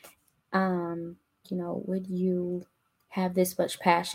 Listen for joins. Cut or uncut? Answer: cut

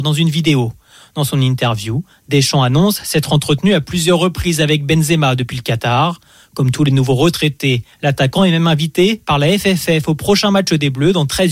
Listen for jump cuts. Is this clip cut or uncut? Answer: uncut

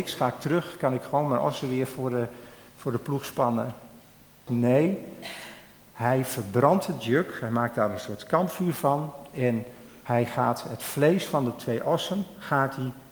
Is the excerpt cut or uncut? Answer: cut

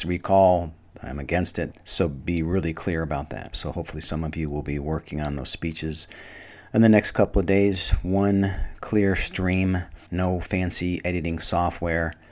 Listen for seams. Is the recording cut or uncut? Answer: cut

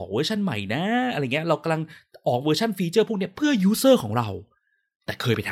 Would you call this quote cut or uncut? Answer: uncut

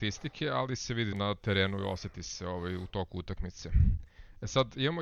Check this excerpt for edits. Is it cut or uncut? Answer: cut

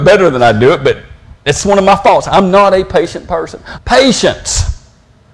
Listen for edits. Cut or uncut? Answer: cut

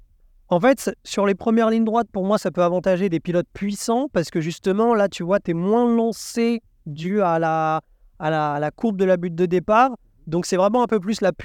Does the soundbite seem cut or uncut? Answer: cut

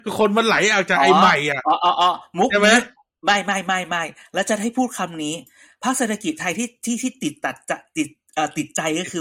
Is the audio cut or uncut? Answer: uncut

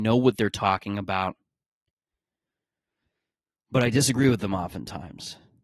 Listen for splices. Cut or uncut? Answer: uncut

